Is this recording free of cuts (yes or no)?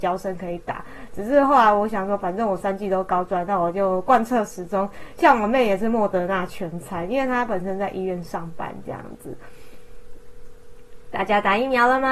yes